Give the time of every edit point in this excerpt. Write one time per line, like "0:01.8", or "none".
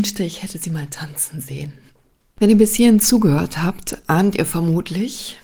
none